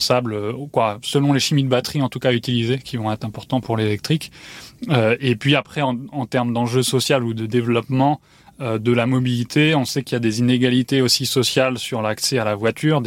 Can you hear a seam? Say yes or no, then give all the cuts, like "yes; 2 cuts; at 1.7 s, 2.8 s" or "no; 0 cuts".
no; 0 cuts